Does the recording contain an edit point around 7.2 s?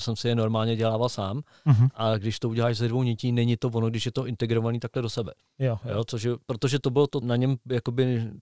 yes; 2 cuts; at 5.8 s, 7.2 s

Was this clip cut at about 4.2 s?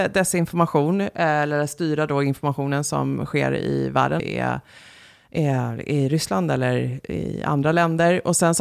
yes; 1 cut; at 4.2 s

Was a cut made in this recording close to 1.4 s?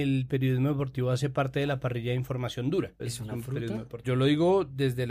no; 2 cuts; at 3.0 s, 4.0 s

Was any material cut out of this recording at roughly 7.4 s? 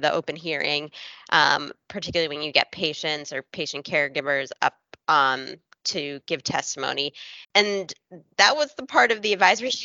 yes; 1 cut; at 7.4 s

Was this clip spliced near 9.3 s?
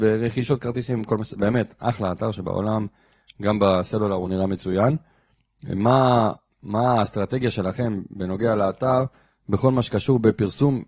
no; 0 cuts

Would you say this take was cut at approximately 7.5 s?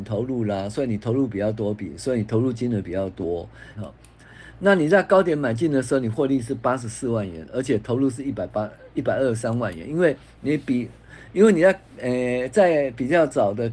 no; 1 cut; at 3.8 s

